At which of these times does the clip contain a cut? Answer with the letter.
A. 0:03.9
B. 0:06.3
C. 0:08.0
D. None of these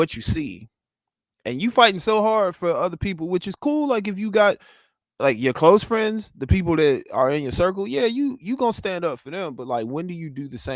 D